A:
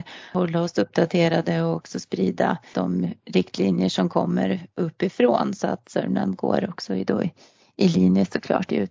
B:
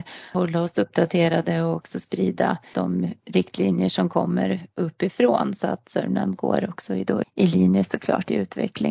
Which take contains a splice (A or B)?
B